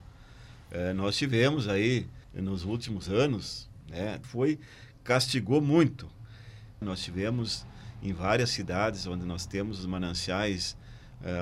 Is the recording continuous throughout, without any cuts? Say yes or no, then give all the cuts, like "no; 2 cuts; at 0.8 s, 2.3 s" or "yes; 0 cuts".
no; 3 cuts; at 2.2 s, 4.2 s, 6.8 s